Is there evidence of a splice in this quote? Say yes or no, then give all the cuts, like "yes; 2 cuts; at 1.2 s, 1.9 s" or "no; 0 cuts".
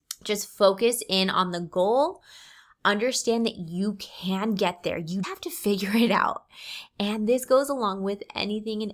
yes; 1 cut; at 5.2 s